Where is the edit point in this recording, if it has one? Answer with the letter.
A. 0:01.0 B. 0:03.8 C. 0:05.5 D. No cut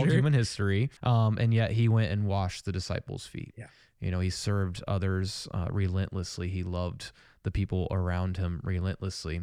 A